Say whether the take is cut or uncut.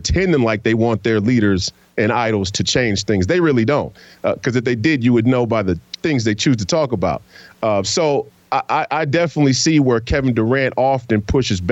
uncut